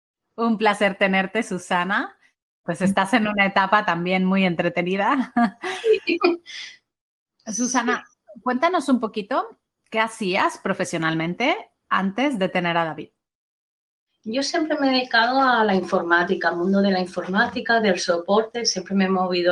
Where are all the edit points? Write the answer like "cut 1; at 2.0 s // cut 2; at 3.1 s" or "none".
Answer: cut 1; at 2.6 s